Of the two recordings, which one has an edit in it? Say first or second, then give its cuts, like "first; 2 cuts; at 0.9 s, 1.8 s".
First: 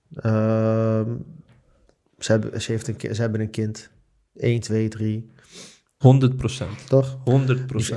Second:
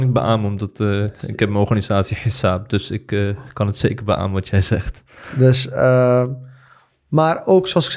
first; 1 cut; at 6.0 s